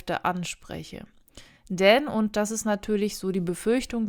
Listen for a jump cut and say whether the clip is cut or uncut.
uncut